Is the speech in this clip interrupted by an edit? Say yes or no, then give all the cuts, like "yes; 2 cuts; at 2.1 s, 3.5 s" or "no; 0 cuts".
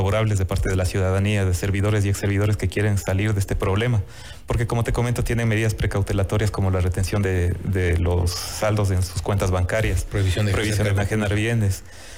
no; 0 cuts